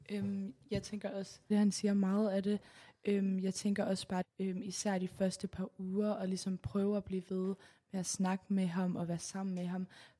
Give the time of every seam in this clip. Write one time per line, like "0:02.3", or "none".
0:01.5
0:04.2